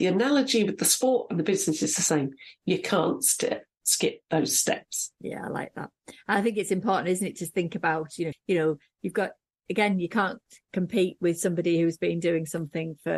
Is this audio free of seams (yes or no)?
no